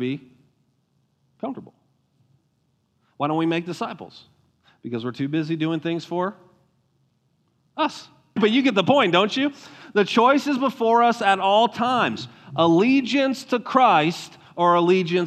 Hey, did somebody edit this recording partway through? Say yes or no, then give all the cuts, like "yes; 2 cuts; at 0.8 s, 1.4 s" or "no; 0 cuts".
yes; 1 cut; at 8.4 s